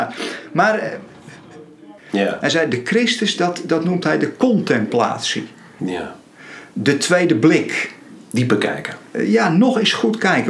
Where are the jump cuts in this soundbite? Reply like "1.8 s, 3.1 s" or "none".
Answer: 2.0 s, 5.8 s